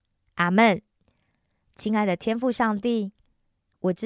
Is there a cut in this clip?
yes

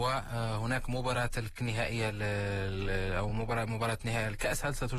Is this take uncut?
yes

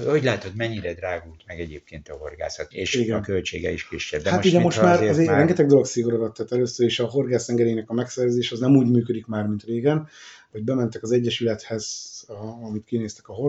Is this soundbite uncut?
no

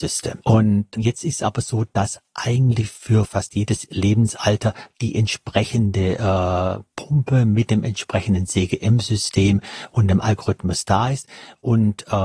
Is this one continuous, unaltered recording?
yes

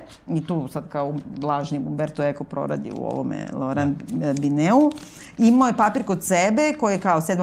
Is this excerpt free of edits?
yes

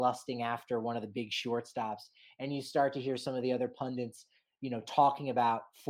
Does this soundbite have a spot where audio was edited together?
no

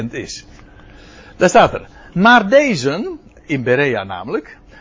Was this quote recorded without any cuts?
yes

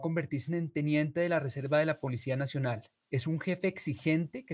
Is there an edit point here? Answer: yes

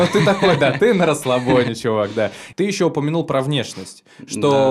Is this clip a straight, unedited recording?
no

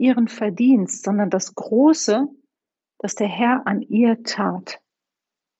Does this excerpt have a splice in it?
no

